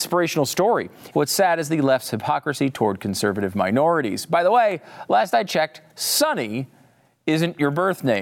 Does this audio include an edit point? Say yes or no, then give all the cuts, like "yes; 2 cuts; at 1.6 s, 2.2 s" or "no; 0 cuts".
yes; 1 cut; at 1.1 s